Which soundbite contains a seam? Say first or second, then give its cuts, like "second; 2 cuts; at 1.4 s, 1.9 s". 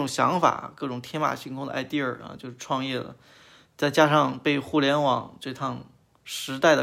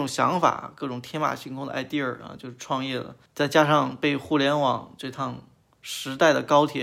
second; 1 cut; at 3.3 s